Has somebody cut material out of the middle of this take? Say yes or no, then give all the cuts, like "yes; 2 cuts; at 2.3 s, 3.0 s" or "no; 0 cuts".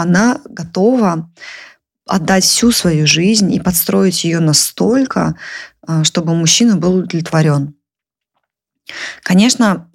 no; 0 cuts